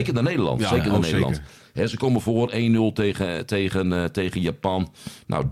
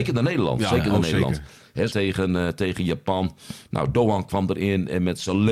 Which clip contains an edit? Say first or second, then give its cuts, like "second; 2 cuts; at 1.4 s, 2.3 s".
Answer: second; 1 cut; at 1.9 s